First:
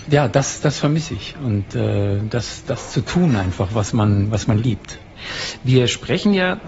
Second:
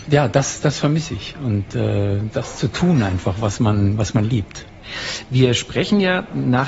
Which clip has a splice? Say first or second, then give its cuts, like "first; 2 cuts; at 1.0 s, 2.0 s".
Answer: second; 1 cut; at 2.3 s